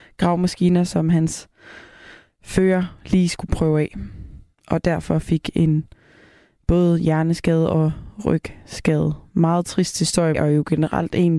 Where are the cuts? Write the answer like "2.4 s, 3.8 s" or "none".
10.3 s

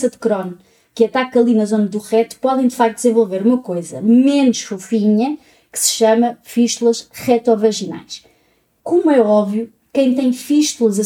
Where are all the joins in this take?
8.8 s

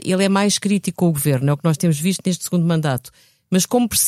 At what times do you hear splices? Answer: none

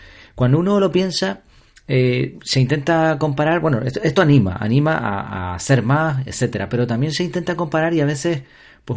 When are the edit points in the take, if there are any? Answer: none

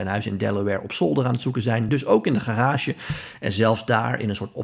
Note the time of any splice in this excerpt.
none

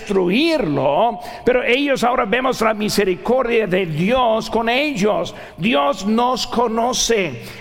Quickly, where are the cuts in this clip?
none

